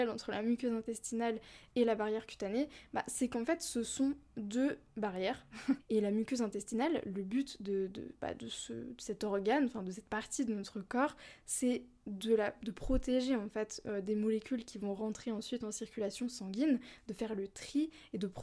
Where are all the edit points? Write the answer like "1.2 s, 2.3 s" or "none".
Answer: 5.8 s

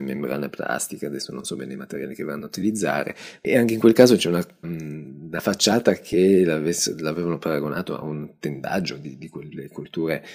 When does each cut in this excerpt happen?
4.6 s

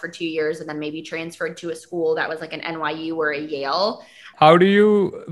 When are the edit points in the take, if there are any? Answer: 4.3 s

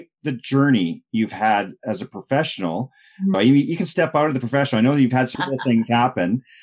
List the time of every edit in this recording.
3.3 s, 5.4 s

